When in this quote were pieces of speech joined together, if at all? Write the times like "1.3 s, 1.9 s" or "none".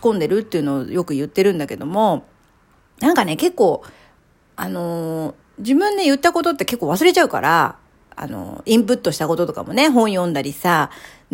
none